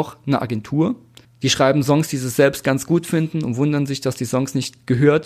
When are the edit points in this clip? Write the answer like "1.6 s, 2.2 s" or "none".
1.2 s